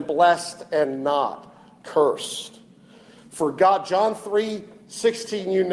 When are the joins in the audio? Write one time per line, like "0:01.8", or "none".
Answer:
none